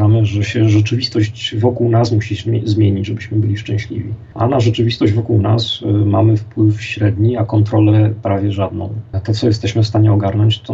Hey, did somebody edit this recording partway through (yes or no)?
no